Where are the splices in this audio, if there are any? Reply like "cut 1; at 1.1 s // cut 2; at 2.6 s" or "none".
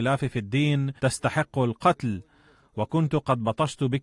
cut 1; at 1.0 s